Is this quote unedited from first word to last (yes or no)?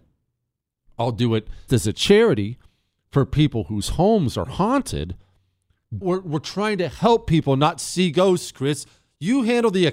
no